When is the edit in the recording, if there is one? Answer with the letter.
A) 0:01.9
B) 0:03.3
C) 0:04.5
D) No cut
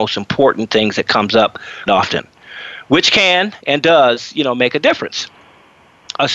A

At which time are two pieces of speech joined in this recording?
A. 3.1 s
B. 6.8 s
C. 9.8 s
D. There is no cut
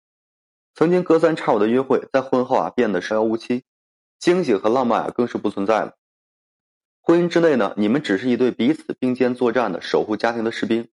A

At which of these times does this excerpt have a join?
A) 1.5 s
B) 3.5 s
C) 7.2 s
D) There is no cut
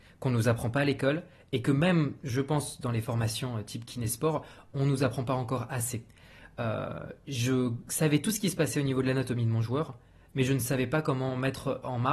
D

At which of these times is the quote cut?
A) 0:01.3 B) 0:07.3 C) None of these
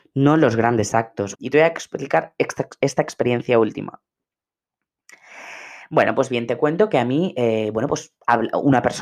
A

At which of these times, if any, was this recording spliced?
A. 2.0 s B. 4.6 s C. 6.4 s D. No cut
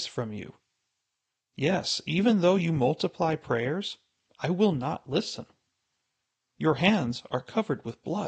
D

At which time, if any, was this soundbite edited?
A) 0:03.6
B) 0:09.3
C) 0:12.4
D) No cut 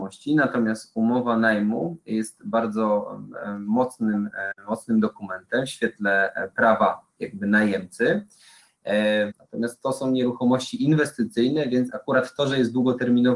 B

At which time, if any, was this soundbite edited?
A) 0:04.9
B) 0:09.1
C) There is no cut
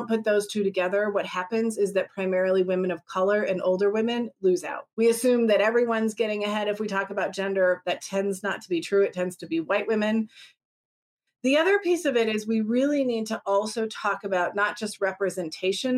A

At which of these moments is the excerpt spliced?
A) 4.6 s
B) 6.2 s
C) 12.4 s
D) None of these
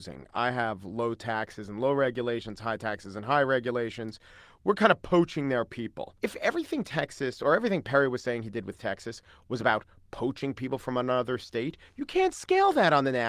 B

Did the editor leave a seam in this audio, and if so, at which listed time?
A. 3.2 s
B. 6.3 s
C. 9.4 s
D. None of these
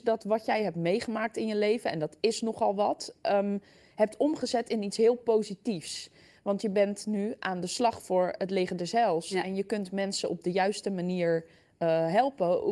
D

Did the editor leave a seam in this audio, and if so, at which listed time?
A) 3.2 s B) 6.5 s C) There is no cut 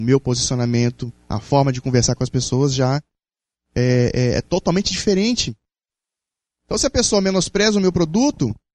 B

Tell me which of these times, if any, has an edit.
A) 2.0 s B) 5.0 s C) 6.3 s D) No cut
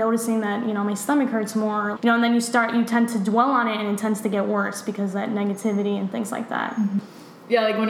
A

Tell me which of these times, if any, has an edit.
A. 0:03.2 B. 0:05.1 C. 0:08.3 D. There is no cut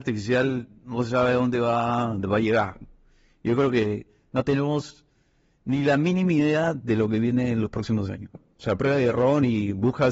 C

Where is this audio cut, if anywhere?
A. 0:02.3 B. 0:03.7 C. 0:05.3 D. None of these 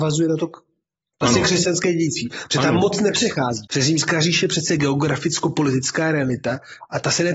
B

